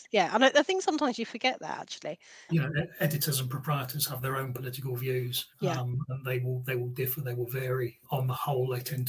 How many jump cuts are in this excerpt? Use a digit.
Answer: 3